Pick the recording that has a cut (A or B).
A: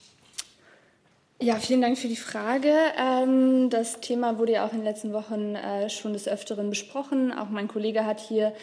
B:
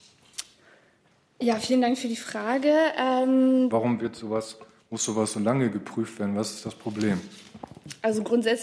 B